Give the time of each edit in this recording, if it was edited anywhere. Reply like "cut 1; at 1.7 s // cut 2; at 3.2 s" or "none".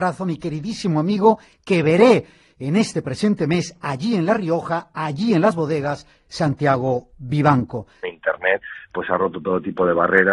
cut 1; at 8.0 s